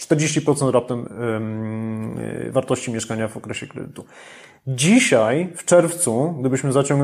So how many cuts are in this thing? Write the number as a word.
zero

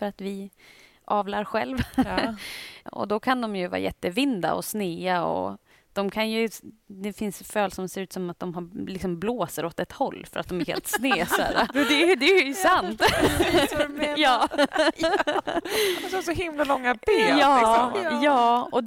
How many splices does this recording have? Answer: two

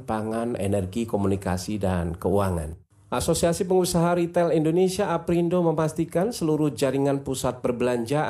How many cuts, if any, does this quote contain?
zero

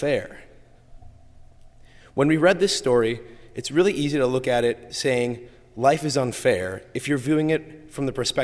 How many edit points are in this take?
zero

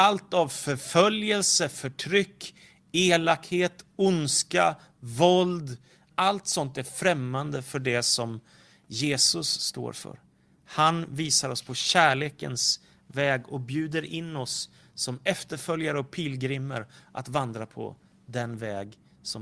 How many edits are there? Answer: one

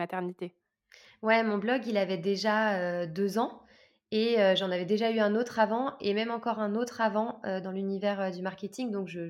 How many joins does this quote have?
zero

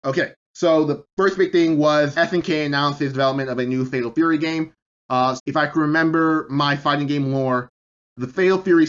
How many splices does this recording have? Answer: two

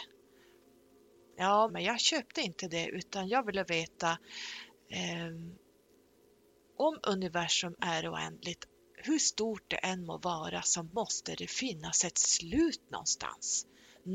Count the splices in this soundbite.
one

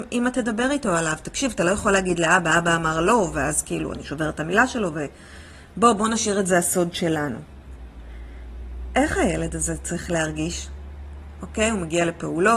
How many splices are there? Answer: zero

